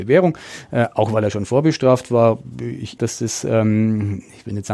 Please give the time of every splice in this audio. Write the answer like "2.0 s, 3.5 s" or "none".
3.0 s